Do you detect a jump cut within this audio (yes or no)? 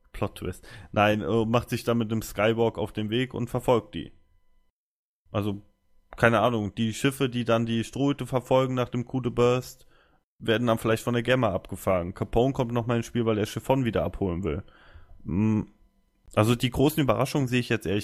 no